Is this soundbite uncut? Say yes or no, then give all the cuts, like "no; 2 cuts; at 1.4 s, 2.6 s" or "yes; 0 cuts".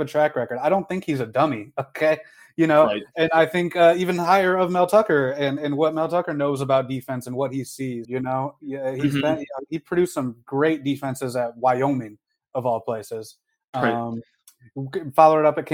no; 1 cut; at 8.0 s